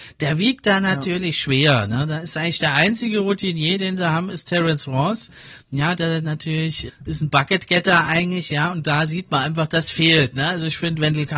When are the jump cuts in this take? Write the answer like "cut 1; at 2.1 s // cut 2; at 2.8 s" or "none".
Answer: cut 1; at 6.9 s